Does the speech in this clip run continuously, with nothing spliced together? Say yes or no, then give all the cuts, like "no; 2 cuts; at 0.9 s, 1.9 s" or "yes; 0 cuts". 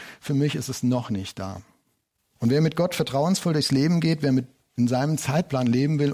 no; 1 cut; at 2.2 s